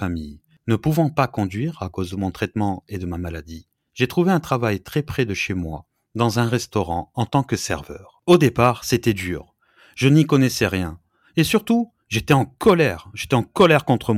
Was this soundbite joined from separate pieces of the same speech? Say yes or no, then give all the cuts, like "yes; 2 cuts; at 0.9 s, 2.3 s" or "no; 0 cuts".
no; 0 cuts